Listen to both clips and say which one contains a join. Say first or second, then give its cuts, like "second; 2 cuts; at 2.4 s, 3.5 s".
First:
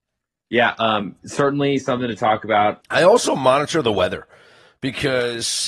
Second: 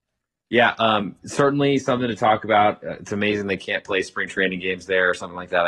first; 1 cut; at 2.8 s